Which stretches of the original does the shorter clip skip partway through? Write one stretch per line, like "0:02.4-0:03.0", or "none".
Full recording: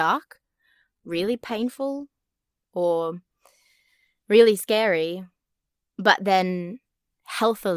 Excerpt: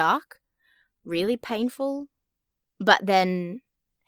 0:02.7-0:05.9